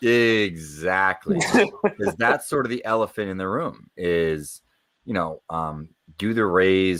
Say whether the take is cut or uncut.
uncut